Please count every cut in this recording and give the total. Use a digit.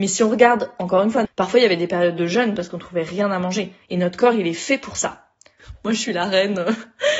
2